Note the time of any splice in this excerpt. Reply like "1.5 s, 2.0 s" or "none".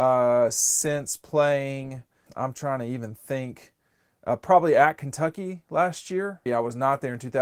2.3 s, 6.5 s